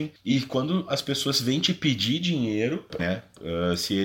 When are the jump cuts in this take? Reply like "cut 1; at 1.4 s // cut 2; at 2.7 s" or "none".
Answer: cut 1; at 3.0 s